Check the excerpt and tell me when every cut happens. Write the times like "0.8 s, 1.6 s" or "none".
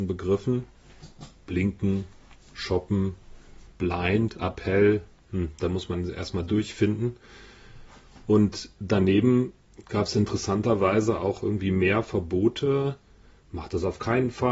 3.7 s